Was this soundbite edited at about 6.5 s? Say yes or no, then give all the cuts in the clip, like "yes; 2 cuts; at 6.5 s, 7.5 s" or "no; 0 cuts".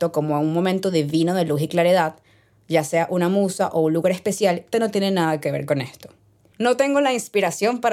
yes; 2 cuts; at 4.7 s, 6.5 s